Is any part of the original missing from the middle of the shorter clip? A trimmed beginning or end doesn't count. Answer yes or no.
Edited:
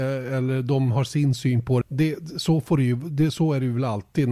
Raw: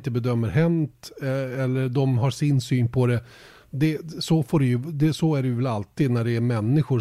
yes